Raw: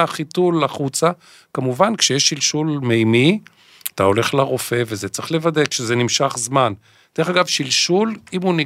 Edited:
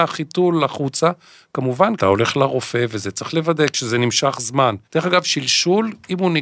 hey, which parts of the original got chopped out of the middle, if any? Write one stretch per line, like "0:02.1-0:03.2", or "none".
0:02.0-0:03.9
0:06.8-0:07.1